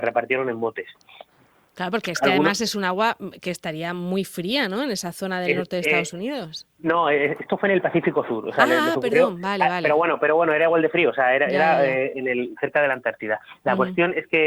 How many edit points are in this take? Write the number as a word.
zero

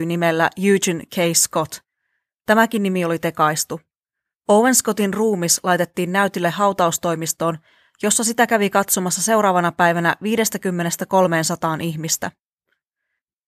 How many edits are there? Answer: zero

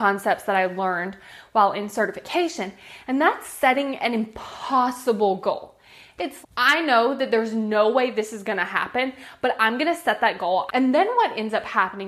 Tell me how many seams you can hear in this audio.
two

